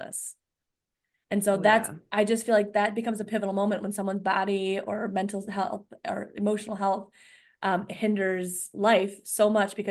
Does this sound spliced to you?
no; 0 cuts

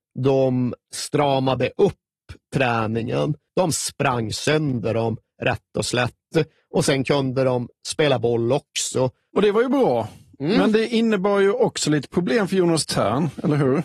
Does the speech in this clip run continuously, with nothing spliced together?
no; 2 cuts; at 3.5 s, 9.3 s

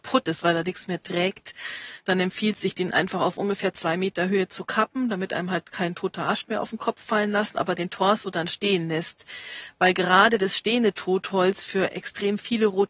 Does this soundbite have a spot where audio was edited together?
no; 0 cuts

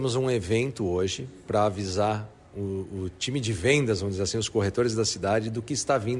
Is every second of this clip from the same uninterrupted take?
yes; 0 cuts

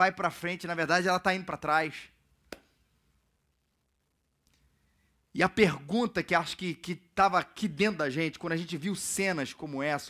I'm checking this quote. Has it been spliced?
no; 0 cuts

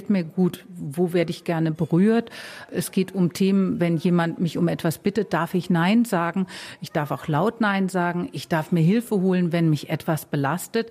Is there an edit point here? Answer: no; 0 cuts

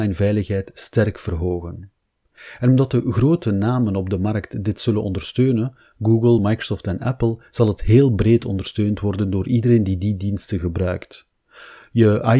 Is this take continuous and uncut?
yes; 0 cuts

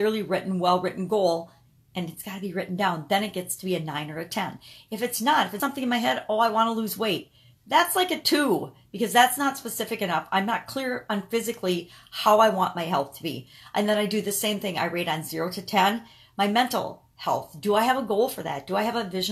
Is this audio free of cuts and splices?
no; 1 cut; at 5.6 s

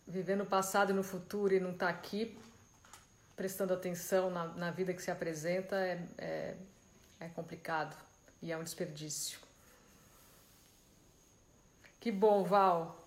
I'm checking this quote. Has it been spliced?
no; 0 cuts

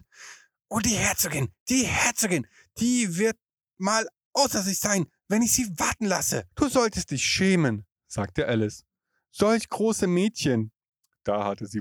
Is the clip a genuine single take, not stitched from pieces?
no; 1 cut; at 6.5 s

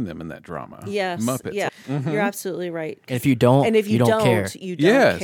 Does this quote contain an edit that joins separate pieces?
yes; 1 cut; at 1.7 s

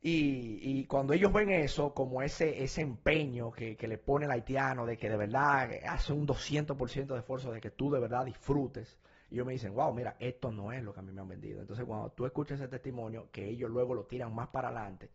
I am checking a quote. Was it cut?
no; 0 cuts

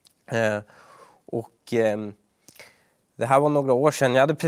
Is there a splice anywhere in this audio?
no; 0 cuts

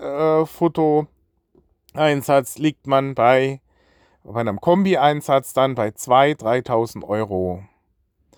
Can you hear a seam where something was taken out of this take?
no; 0 cuts

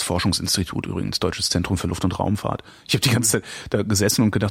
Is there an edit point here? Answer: no; 0 cuts

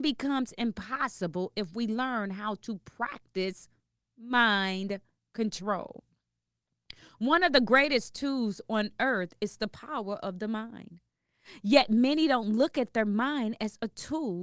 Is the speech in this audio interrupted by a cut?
no; 0 cuts

